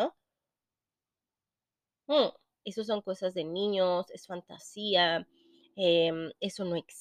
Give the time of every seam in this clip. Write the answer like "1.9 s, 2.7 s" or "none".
2.6 s